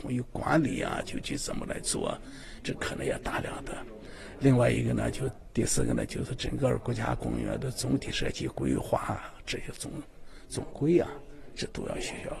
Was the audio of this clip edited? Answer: no; 0 cuts

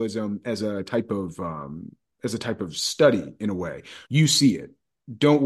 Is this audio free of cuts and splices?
no; 1 cut; at 4.1 s

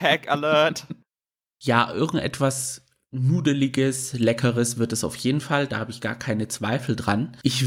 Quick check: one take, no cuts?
yes; 0 cuts

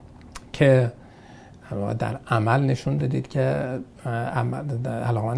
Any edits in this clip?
yes; 1 cut; at 3.9 s

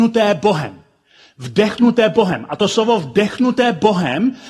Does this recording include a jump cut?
no; 0 cuts

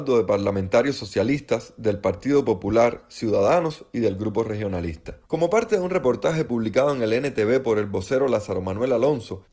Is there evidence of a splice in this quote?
yes; 1 cut; at 5.3 s

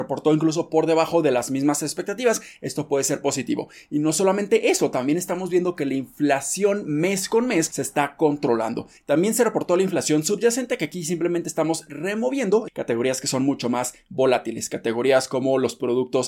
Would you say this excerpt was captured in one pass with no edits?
no; 2 cuts; at 9.0 s, 12.7 s

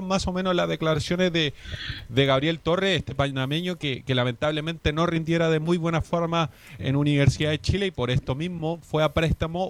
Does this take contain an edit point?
yes; 1 cut; at 6.8 s

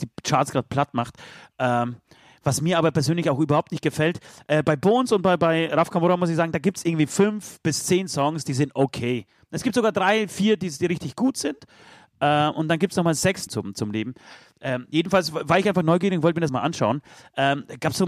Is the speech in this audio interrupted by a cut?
yes; 2 cuts; at 13.5 s, 16.5 s

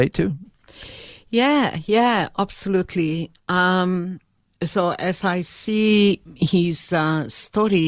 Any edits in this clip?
no; 0 cuts

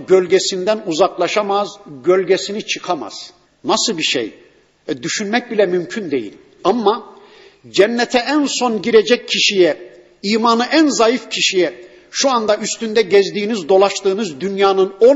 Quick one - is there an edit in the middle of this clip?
yes; 2 cuts; at 3.5 s, 6.6 s

